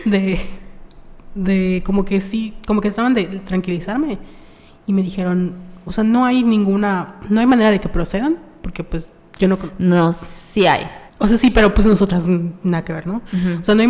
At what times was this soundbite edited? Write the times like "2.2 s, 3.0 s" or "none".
11.1 s